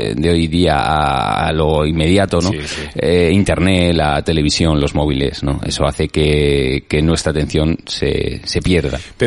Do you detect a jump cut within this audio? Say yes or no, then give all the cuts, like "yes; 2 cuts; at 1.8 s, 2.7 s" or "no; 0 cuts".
no; 0 cuts